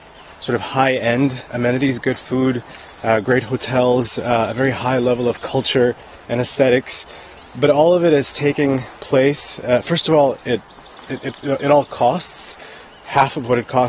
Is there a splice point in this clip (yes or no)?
no